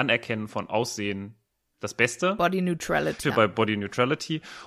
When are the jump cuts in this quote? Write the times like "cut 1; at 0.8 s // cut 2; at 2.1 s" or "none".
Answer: cut 1; at 3.2 s